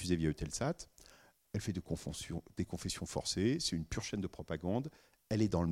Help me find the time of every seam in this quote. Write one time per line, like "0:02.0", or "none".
none